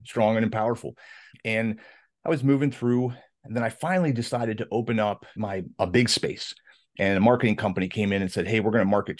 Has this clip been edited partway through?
no; 0 cuts

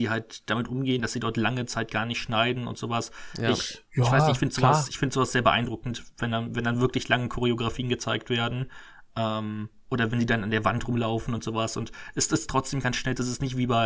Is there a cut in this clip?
yes; 1 cut; at 1.0 s

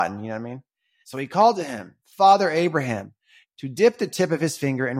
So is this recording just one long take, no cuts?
no; 2 cuts; at 1.0 s, 3.4 s

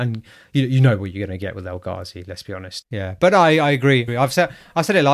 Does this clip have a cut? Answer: yes; 2 cuts; at 2.8 s, 4.1 s

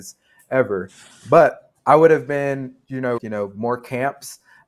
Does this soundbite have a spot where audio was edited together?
yes; 2 cuts; at 1.8 s, 3.2 s

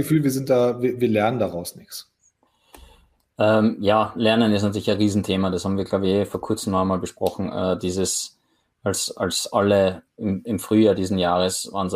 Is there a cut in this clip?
no; 0 cuts

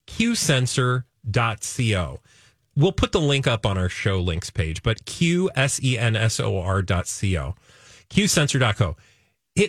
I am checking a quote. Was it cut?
no; 0 cuts

